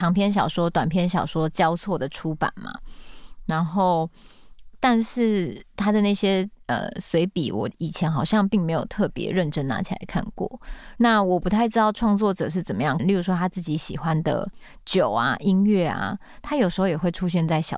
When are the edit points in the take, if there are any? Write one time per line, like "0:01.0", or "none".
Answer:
0:11.0
0:13.0

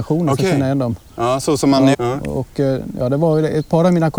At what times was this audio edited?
0:01.9

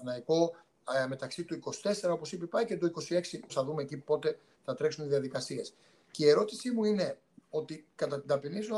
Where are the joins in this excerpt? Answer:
0:03.5

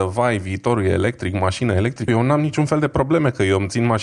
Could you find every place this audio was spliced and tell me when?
0:02.1

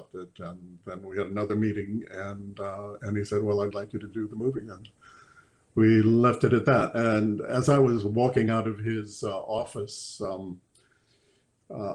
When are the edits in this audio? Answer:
0:03.7

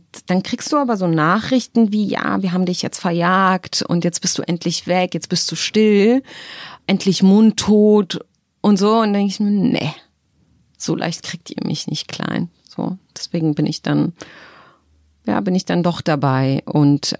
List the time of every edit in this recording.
none

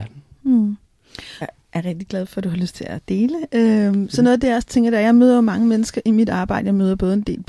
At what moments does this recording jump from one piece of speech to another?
0:01.4

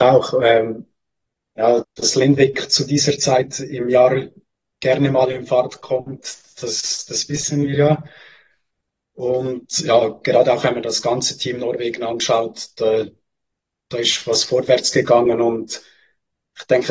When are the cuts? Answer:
0:01.8

